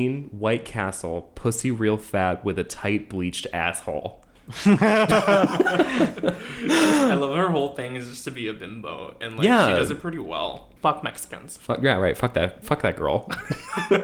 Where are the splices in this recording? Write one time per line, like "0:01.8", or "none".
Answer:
0:10.8